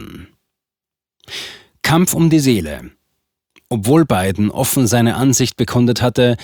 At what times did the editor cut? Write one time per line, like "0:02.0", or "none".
none